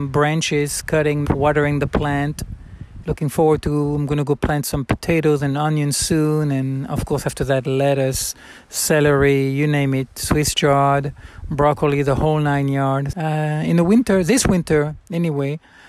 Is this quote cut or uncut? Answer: cut